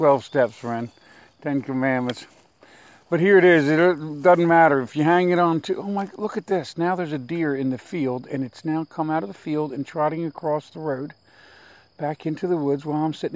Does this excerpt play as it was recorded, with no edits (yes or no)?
yes